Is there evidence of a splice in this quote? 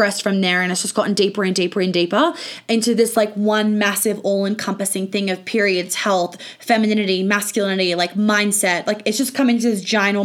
no; 0 cuts

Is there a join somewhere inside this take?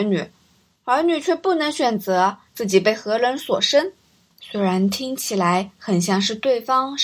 yes; 1 cut; at 4.3 s

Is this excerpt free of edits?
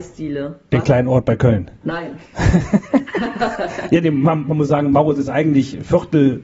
no; 1 cut; at 1.8 s

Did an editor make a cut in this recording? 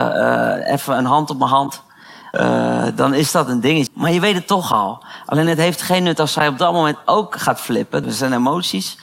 yes; 3 cuts; at 2.3 s, 3.9 s, 8.0 s

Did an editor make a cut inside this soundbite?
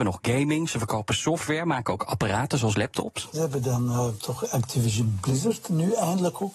yes; 1 cut; at 3.3 s

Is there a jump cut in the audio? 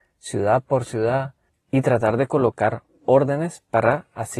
no; 0 cuts

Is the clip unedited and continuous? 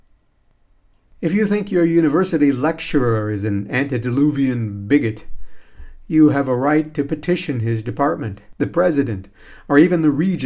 yes; 0 cuts

